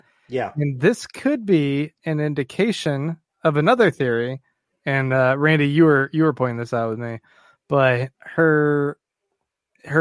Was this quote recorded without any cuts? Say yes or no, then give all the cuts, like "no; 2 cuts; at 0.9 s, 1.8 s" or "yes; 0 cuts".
no; 2 cuts; at 4.7 s, 8.1 s